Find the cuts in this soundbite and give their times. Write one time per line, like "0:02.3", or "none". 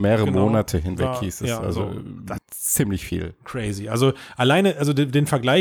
0:02.4